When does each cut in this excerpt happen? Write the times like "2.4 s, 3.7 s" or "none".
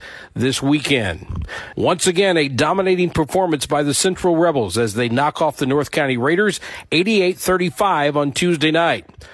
1.7 s